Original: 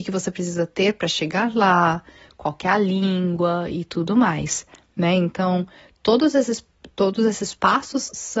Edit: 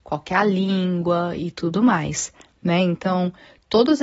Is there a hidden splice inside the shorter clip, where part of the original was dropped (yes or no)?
no